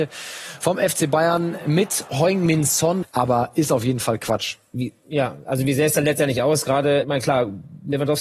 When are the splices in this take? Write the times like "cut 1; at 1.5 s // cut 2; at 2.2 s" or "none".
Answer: cut 1; at 3.0 s // cut 2; at 7.0 s